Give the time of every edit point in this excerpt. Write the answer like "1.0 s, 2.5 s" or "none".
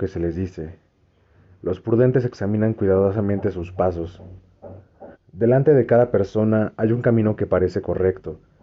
5.1 s